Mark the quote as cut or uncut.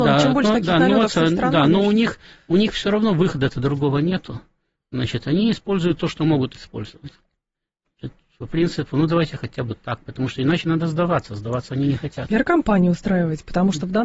uncut